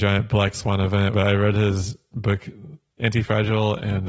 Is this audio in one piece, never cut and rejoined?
no; 1 cut; at 1.1 s

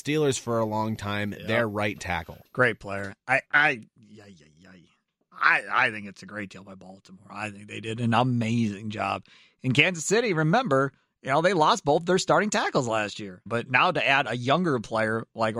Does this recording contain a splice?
yes; 2 cuts; at 3.4 s, 13.5 s

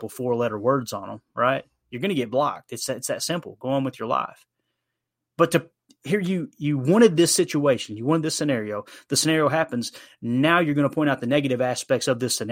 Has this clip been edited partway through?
no; 0 cuts

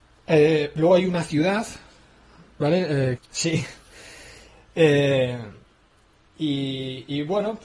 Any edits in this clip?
yes; 1 cut; at 3.1 s

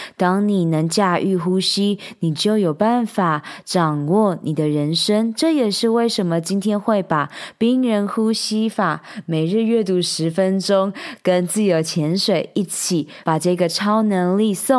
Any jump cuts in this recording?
yes; 1 cut; at 13.2 s

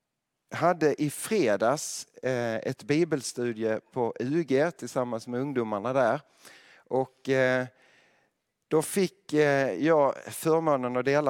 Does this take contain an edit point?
no; 0 cuts

